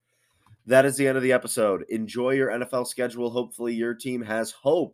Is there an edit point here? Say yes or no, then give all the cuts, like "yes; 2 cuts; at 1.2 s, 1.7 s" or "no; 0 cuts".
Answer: no; 0 cuts